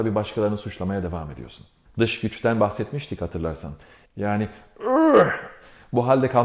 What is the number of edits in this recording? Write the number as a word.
two